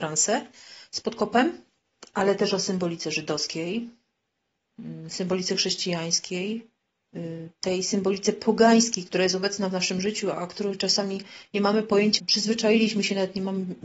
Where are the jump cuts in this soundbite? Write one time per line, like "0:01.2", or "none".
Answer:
0:10.3
0:12.2